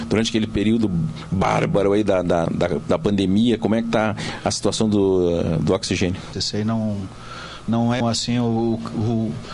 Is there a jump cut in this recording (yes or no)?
yes